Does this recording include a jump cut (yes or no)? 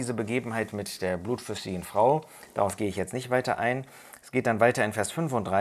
no